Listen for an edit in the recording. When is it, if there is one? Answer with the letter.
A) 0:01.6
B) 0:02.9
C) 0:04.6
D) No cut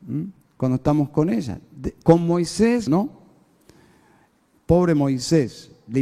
B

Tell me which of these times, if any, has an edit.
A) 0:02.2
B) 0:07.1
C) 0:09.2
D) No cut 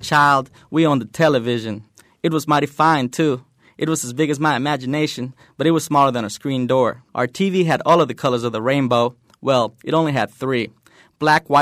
B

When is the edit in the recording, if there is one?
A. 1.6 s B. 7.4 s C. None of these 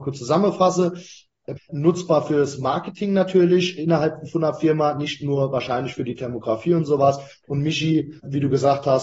A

